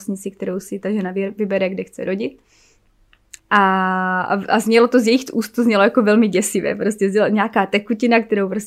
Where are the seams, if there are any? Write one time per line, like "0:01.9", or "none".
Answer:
0:03.4